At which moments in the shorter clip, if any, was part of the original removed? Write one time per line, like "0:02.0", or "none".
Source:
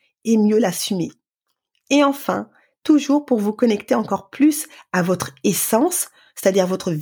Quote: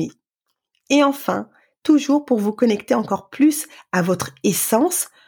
none